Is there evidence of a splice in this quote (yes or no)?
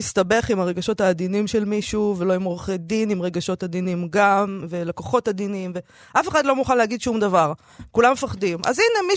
no